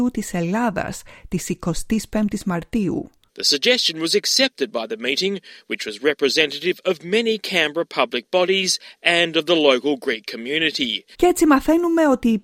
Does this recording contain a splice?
yes; 2 cuts; at 3.3 s, 11.1 s

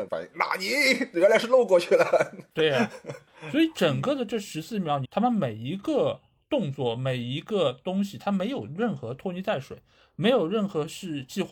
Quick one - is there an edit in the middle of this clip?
yes; 1 cut; at 5.0 s

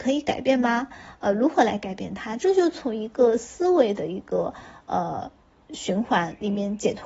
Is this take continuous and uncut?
yes; 0 cuts

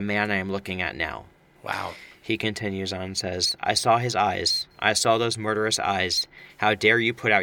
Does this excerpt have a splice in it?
no; 0 cuts

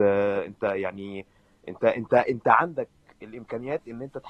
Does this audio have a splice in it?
no; 0 cuts

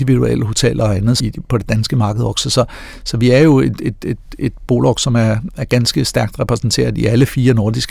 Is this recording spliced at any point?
yes; 1 cut; at 1.2 s

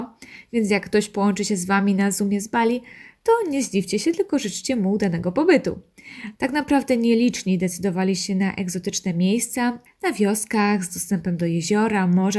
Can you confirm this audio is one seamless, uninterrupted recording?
no; 2 cuts; at 6.4 s, 9.9 s

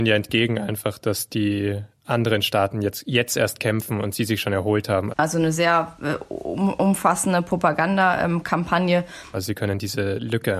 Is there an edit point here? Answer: yes; 2 cuts; at 5.1 s, 9.3 s

